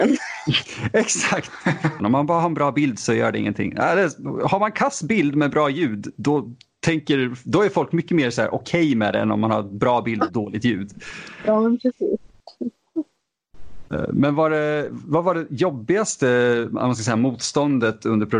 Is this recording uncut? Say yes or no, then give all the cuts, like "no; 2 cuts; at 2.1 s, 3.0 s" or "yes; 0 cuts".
no; 1 cut; at 2.0 s